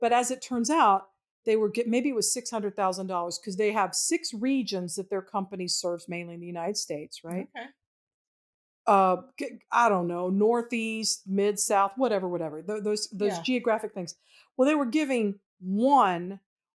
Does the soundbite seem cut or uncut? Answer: uncut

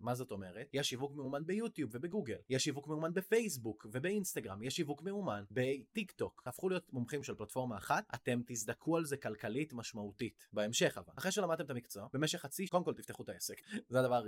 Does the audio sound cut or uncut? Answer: cut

